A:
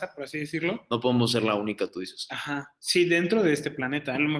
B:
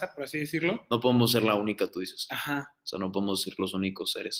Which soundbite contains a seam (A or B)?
A